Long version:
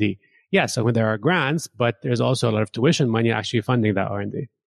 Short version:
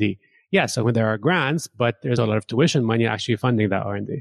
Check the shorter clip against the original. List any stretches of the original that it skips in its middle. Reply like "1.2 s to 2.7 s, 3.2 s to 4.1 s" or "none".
2.2 s to 2.4 s